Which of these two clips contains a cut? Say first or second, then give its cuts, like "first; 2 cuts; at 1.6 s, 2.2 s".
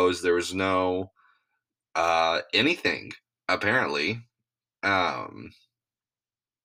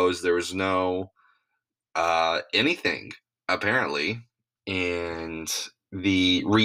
second; 1 cut; at 4.6 s